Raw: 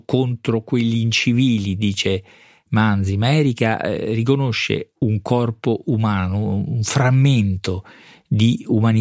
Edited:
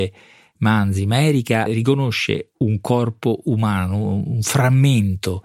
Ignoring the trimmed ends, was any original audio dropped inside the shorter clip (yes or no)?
yes